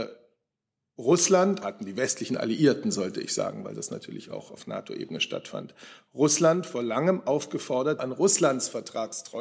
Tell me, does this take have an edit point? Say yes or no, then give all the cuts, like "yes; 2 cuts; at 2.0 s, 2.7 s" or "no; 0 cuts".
yes; 2 cuts; at 1.6 s, 8.0 s